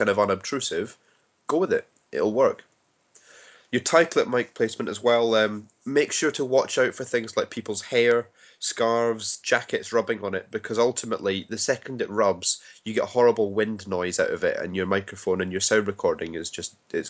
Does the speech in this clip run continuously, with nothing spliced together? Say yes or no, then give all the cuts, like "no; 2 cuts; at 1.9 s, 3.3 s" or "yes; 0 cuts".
yes; 0 cuts